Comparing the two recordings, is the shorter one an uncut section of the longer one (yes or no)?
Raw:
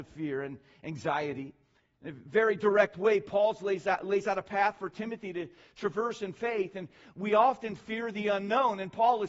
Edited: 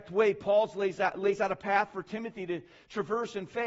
yes